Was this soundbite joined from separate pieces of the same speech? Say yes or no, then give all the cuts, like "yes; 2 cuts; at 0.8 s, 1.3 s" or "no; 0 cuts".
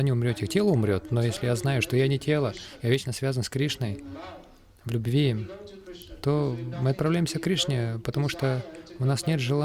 no; 0 cuts